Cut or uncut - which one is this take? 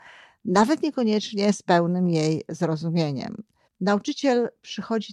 cut